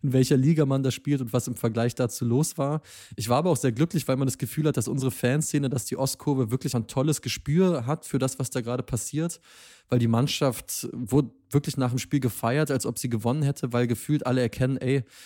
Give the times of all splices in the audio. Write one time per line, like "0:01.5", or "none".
0:06.7